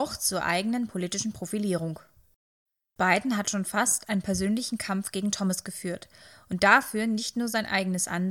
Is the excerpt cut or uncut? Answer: uncut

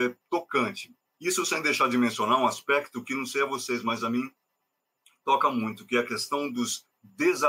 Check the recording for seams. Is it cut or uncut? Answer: cut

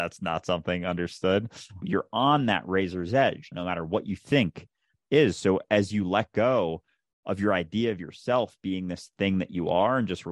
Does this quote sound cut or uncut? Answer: cut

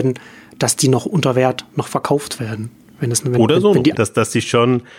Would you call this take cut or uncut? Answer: cut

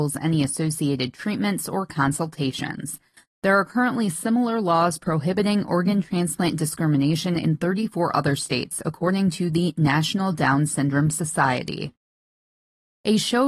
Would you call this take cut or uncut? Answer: cut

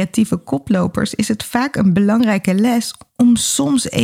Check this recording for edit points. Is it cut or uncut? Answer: uncut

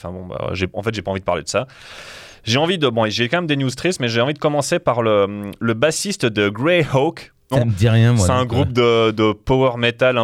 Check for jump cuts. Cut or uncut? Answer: cut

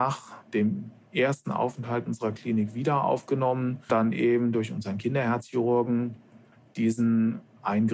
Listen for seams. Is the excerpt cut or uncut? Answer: cut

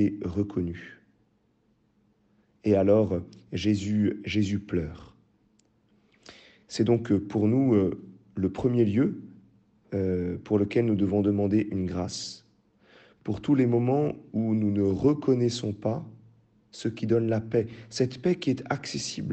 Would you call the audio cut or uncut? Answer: uncut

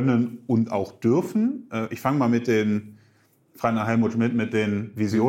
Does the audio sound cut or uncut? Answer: uncut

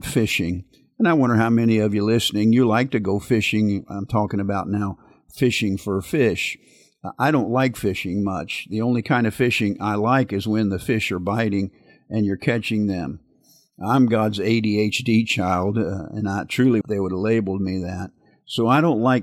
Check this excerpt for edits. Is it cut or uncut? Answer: cut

